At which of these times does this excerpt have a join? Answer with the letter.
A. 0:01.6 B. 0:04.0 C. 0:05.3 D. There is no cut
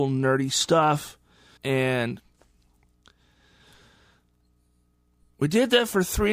A